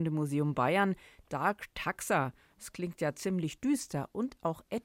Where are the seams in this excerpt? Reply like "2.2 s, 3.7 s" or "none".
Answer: none

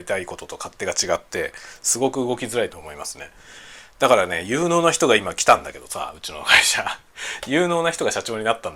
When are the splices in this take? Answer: 2.7 s

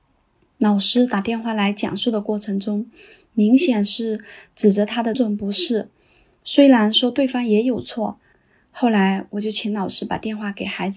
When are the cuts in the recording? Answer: 5.1 s, 8.3 s

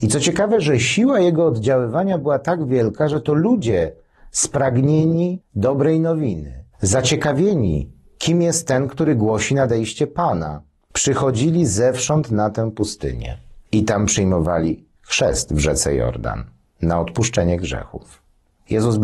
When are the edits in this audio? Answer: 6.7 s, 13.6 s

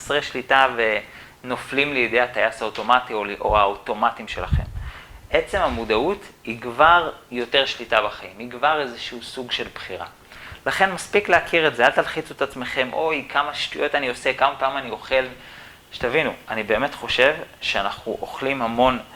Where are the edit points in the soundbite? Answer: none

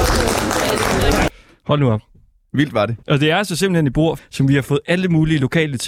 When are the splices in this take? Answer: 3.0 s, 4.2 s

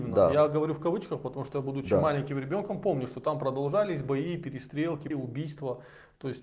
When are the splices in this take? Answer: 5.1 s

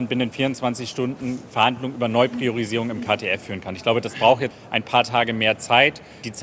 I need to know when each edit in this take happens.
4.5 s

